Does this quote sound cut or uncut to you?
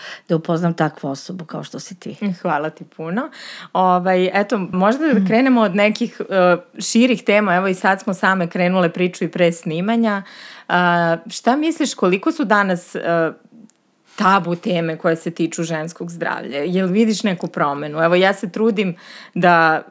cut